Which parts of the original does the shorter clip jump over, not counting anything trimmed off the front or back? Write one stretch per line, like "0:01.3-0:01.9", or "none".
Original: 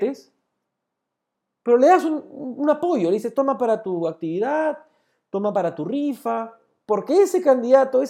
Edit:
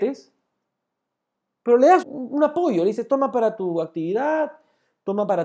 0:02.0-0:02.3